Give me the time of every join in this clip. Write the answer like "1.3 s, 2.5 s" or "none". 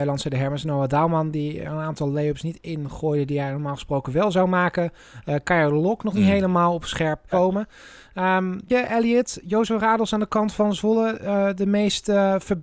7.3 s, 8.7 s